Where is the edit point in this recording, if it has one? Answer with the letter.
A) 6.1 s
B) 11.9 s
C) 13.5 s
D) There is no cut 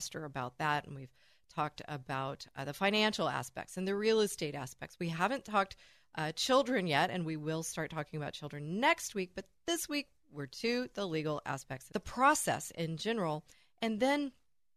B